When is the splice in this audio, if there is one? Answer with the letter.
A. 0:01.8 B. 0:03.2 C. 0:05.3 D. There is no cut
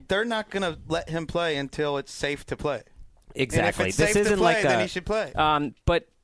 C